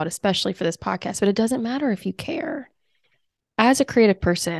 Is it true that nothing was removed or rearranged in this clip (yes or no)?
no